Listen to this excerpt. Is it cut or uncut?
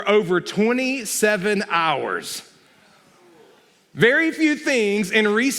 uncut